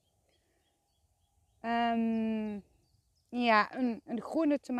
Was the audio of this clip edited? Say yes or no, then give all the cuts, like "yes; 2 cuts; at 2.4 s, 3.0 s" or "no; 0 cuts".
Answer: no; 0 cuts